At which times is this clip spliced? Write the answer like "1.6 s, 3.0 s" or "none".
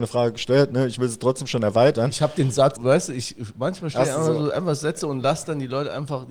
2.8 s